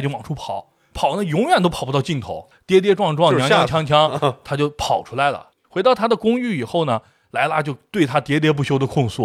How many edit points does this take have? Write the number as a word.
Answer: two